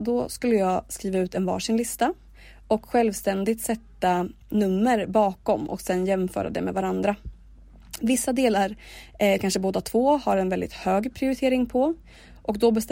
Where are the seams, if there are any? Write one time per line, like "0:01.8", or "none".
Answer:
none